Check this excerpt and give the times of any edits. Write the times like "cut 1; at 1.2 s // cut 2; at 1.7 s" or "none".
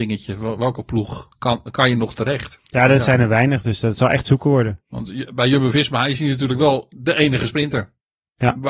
none